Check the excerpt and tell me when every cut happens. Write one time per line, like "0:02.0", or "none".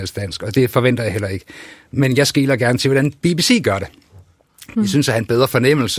none